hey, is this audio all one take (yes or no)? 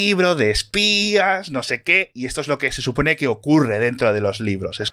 yes